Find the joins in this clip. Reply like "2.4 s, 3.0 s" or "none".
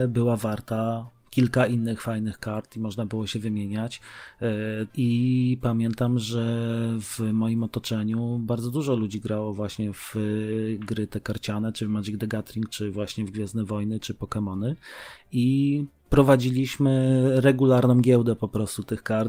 4.9 s